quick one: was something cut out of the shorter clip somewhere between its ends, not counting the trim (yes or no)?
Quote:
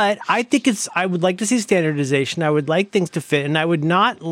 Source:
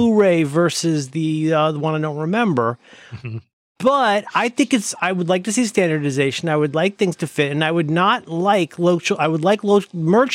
no